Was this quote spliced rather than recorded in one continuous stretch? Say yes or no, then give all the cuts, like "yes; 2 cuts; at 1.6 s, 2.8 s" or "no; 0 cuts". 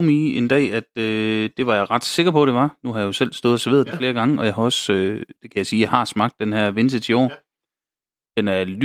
no; 0 cuts